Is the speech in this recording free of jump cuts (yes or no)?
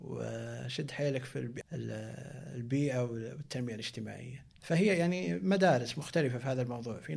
no